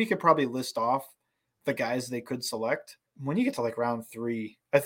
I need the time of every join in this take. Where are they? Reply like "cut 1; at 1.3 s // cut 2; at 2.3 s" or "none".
cut 1; at 3.1 s